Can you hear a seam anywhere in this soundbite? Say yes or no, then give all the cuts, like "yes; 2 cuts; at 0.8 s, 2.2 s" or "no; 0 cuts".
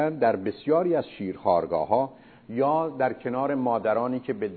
no; 0 cuts